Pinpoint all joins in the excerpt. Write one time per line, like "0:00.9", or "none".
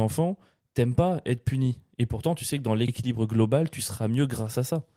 none